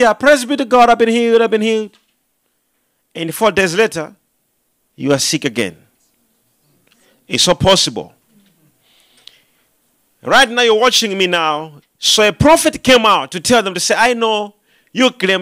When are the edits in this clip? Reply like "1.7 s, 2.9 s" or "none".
11.8 s